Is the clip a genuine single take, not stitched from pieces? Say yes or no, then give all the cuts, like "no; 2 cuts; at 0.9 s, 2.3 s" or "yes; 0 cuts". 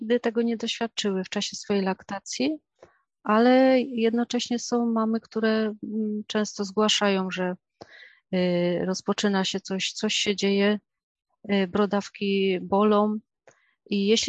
no; 1 cut; at 9.9 s